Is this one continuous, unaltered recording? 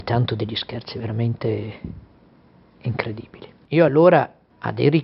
yes; 0 cuts

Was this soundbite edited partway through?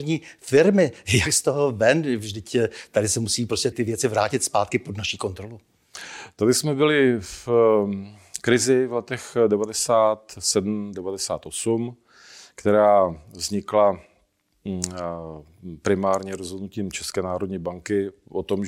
yes; 1 cut; at 3.7 s

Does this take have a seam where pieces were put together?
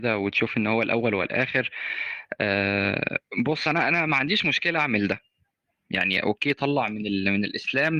no; 0 cuts

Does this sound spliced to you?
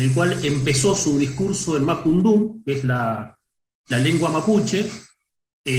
no; 0 cuts

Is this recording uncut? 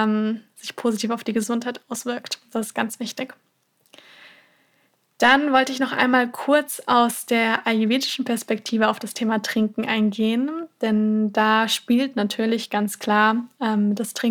yes; 0 cuts

